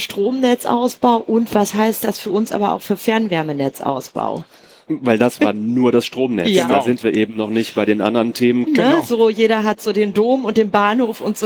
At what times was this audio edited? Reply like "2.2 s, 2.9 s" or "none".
5.4 s, 8.7 s